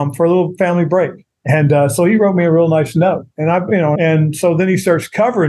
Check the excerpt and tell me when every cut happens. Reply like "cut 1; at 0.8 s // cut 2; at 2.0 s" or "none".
cut 1; at 1.4 s // cut 2; at 4.0 s